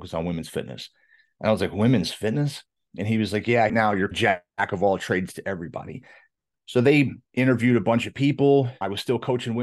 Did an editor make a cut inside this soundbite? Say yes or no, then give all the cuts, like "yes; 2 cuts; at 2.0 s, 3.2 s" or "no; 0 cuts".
yes; 1 cut; at 3.7 s